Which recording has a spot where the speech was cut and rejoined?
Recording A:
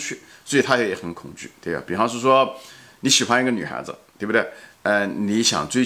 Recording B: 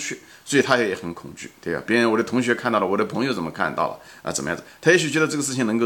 B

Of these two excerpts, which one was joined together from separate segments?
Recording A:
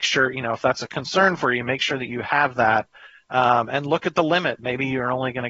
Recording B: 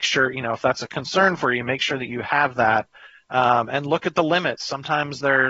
A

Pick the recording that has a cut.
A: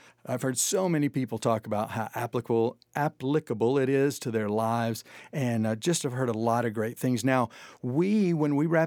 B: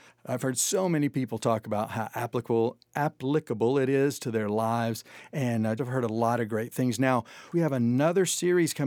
B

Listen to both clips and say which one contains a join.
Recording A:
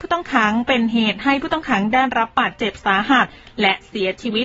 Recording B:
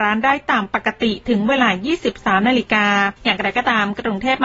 B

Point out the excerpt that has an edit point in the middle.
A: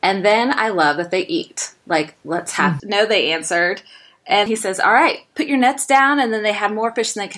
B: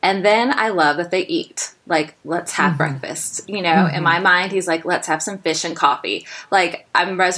A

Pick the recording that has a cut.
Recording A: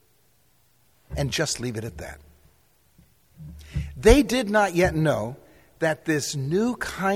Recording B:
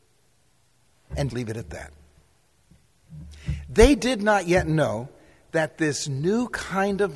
B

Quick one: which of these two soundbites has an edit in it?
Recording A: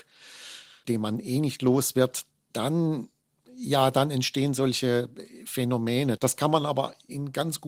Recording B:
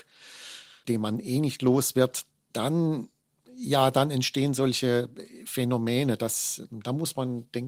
A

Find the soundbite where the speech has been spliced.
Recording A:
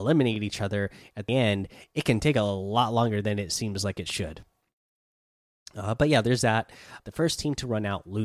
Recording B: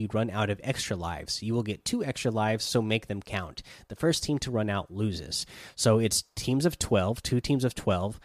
A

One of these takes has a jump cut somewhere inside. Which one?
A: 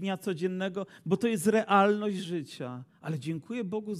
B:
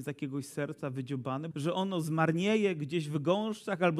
B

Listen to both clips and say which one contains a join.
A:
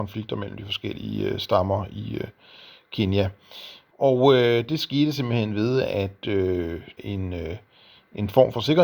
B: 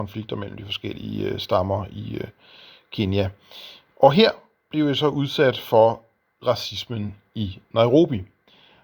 A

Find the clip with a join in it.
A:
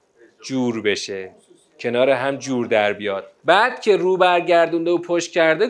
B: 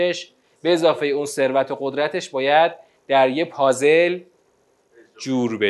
A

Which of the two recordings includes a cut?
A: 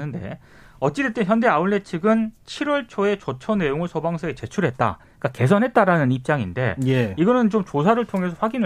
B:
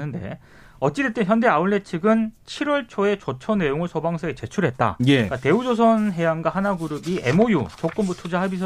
B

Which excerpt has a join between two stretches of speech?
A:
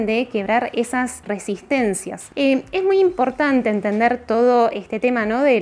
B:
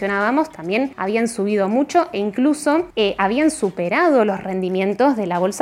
A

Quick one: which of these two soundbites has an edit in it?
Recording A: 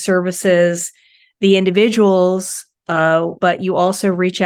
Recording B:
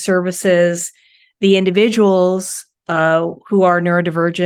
A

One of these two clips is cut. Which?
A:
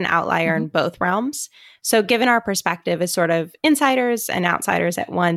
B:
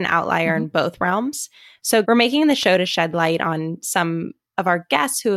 B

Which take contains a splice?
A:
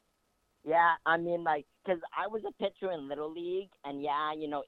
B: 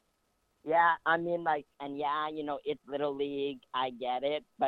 B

